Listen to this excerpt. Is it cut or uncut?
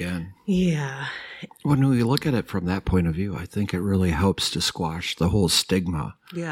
cut